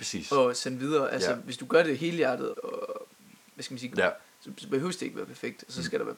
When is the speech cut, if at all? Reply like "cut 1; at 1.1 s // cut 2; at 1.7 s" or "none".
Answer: cut 1; at 2.5 s // cut 2; at 3.9 s